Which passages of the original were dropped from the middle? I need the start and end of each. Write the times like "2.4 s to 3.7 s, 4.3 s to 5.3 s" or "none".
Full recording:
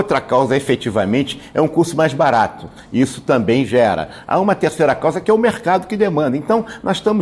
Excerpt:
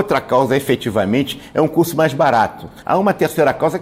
2.8 s to 4.2 s

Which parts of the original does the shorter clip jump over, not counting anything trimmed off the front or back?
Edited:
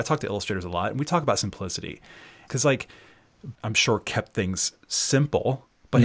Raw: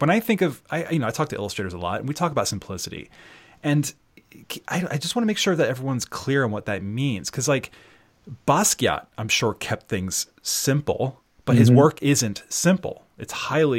3.6 s to 7.3 s, 8.4 s to 9.1 s

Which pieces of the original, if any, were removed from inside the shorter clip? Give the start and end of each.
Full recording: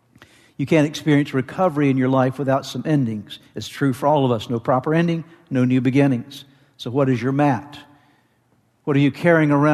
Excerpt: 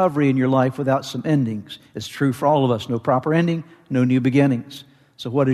none

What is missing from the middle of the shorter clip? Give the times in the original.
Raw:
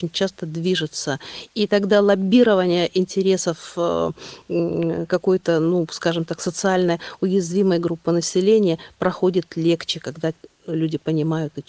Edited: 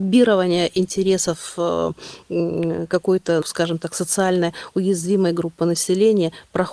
5.6 s to 5.9 s

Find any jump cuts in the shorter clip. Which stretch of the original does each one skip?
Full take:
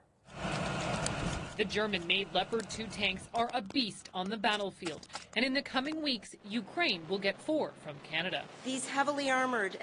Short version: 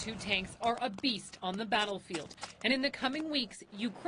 none

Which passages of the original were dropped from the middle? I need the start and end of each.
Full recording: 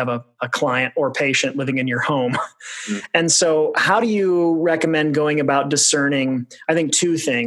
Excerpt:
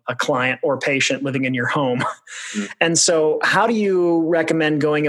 none

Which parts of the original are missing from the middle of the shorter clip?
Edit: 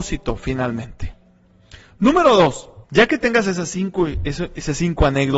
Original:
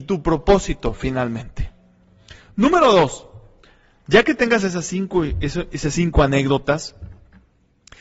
3.4 s to 4.0 s

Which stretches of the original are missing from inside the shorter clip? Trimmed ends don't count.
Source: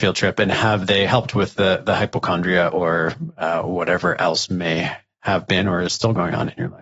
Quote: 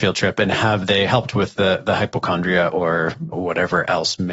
3.3 s to 3.6 s

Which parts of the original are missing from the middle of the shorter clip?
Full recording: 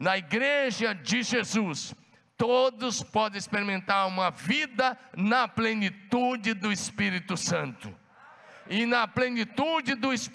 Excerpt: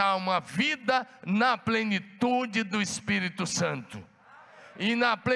none

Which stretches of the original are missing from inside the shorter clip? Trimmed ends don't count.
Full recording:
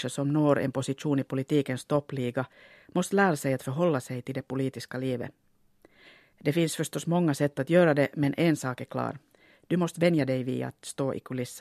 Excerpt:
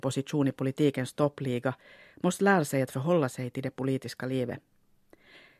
none

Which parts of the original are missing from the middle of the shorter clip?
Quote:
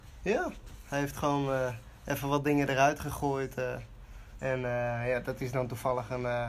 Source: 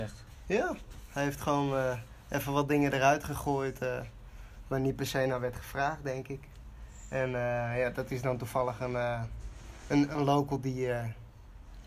4.6 s to 7.1 s

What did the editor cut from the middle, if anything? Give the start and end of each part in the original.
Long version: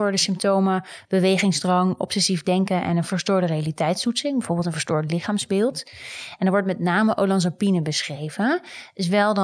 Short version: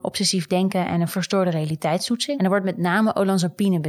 4.3 s to 6.4 s

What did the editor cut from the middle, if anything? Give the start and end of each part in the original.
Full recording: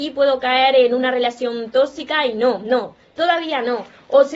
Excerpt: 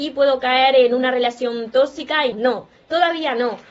2.3 s to 2.6 s

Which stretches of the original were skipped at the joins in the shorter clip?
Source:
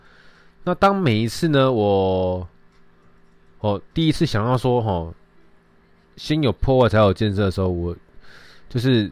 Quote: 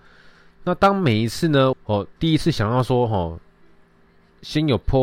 1.7 s to 3.5 s

